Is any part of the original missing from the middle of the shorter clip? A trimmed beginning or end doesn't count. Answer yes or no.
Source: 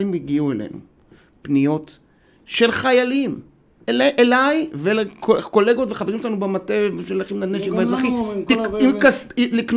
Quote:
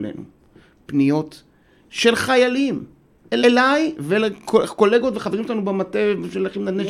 yes